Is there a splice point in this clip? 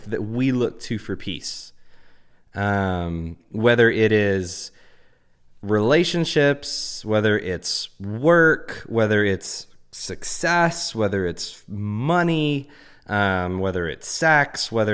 no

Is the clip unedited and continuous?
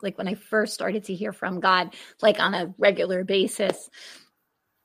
yes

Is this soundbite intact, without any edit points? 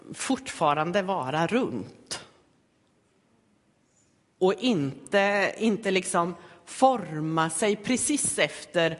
yes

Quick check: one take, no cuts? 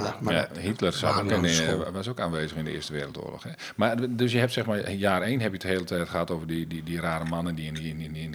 yes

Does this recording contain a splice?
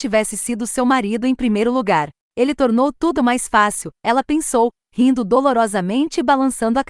yes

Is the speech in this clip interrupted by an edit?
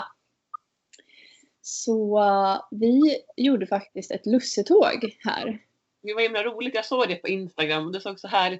no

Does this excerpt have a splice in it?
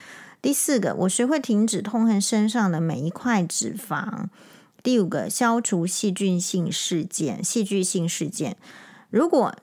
no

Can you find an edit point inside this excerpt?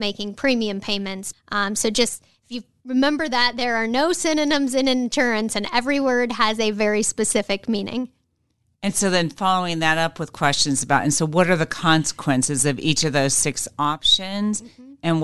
yes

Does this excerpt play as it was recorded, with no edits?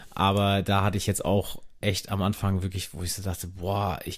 yes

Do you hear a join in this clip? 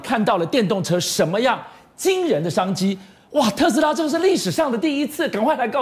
no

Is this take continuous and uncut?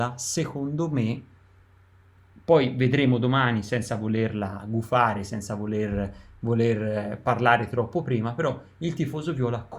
yes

